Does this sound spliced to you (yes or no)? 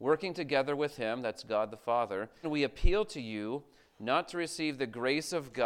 yes